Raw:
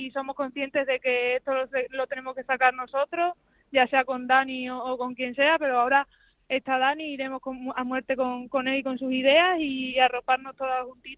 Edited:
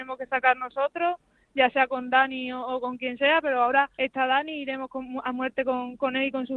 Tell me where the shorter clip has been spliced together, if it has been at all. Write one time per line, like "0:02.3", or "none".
0:03.9